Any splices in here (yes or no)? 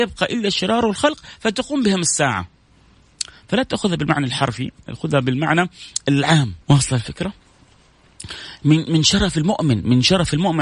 yes